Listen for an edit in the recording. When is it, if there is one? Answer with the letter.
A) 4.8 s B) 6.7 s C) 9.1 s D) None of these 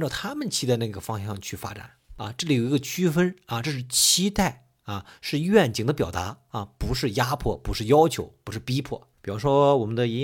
C